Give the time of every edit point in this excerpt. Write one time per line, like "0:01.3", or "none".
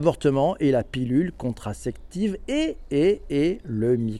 none